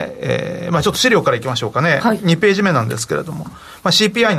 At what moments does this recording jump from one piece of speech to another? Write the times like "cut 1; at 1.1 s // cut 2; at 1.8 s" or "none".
none